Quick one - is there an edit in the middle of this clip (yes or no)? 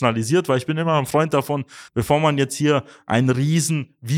yes